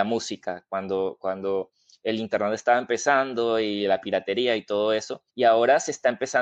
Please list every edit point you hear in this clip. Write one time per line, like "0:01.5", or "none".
0:05.3